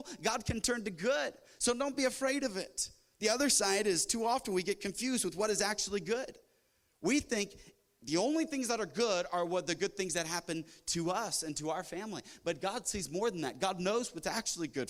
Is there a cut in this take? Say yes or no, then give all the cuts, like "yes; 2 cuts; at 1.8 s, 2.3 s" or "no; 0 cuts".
no; 0 cuts